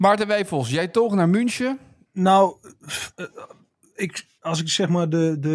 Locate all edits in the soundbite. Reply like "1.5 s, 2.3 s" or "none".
2.1 s